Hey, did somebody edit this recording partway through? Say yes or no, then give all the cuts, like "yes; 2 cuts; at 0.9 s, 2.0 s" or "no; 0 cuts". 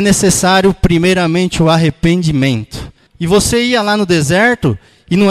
yes; 1 cut; at 3.1 s